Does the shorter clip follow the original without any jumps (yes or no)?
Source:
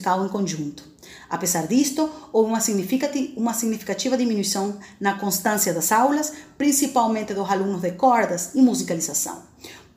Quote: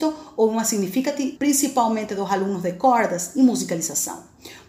no